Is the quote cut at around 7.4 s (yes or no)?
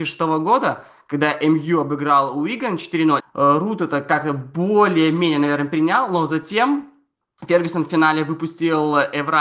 no